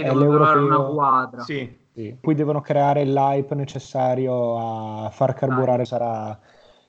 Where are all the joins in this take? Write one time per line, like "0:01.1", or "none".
0:02.2
0:05.9

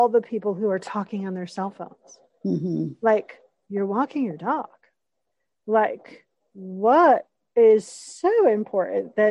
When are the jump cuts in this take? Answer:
none

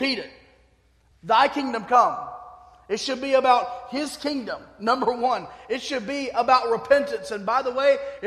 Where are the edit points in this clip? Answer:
0:01.1

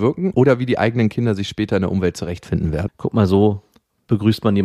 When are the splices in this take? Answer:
0:02.9

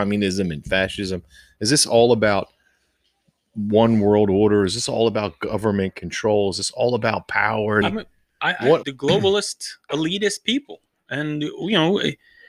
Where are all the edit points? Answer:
0:07.8
0:08.8

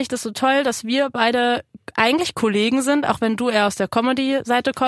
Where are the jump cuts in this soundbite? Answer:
none

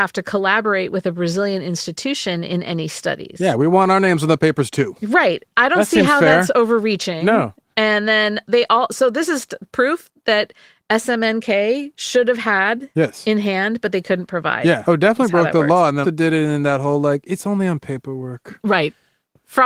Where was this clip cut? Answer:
0:14.8
0:16.0

